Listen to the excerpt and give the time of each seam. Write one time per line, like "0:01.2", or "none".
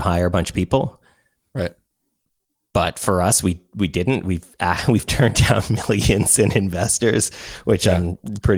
none